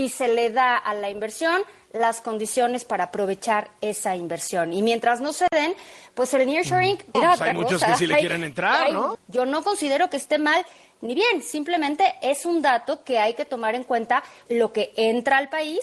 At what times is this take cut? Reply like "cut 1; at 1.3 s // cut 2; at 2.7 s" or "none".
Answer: cut 1; at 7.1 s // cut 2; at 9.1 s // cut 3; at 14.5 s

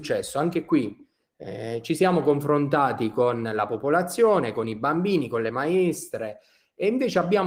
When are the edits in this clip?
none

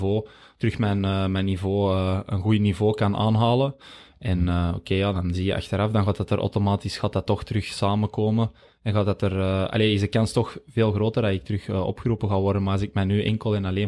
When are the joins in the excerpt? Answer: none

